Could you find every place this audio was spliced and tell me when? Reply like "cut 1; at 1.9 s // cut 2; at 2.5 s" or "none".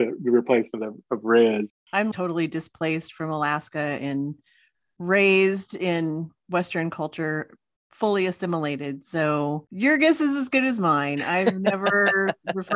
cut 1; at 2.1 s